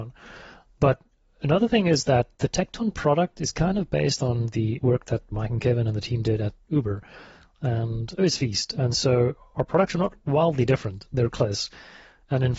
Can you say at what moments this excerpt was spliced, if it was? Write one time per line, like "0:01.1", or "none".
0:08.2
0:11.3